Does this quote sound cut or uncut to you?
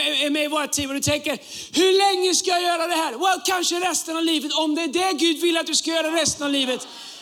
uncut